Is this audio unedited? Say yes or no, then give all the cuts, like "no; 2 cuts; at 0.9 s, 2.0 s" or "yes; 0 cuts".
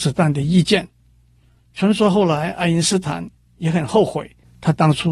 yes; 0 cuts